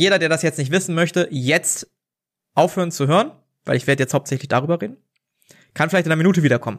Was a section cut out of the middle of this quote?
no; 0 cuts

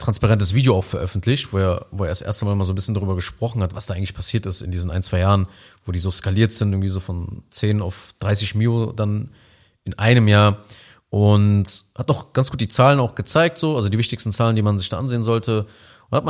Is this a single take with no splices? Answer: yes; 0 cuts

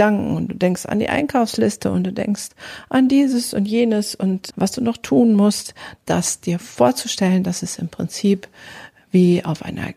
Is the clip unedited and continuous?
no; 2 cuts; at 4.5 s, 6.0 s

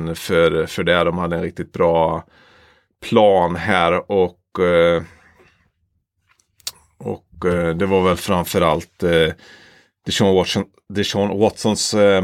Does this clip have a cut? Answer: no; 0 cuts

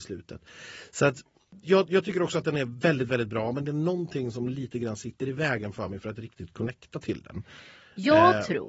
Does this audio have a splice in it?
yes; 1 cut; at 1.6 s

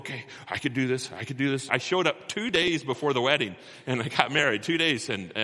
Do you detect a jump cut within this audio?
yes; 1 cut; at 1.7 s

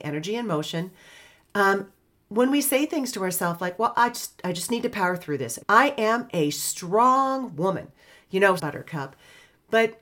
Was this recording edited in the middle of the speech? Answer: yes; 2 cuts; at 5.6 s, 8.6 s

